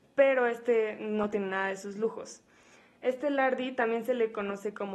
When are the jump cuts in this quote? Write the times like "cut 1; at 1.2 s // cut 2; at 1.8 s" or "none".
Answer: none